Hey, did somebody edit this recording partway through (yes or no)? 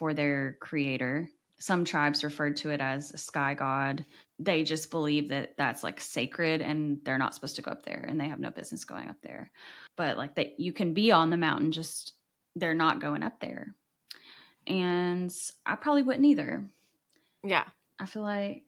no